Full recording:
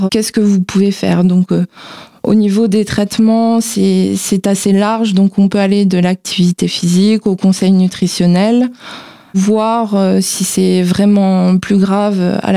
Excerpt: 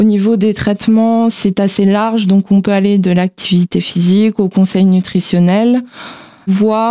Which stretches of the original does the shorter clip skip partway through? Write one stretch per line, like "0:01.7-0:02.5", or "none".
0:03.6-0:04.2